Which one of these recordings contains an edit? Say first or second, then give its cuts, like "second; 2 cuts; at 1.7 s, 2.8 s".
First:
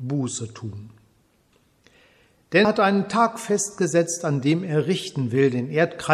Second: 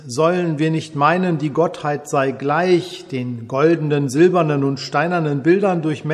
first; 1 cut; at 2.6 s